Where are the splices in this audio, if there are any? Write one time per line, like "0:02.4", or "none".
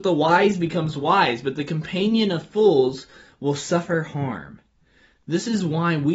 none